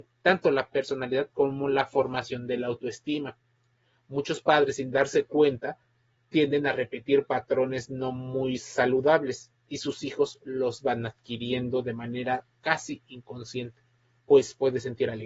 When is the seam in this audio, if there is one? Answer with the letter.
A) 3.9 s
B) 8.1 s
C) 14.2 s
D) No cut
C